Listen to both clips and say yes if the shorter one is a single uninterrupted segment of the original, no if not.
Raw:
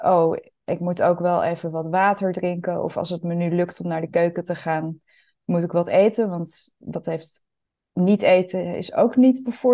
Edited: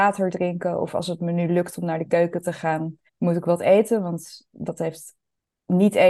no